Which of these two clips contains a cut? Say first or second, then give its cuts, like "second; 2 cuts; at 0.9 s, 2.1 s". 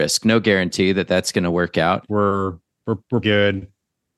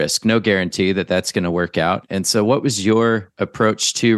first; 2 cuts; at 2.1 s, 3.2 s